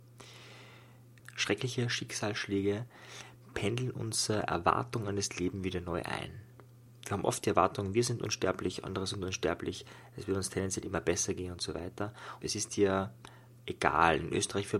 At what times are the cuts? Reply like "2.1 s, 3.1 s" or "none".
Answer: 12.4 s